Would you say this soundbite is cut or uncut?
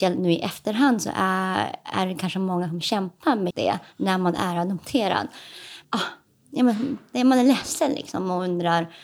cut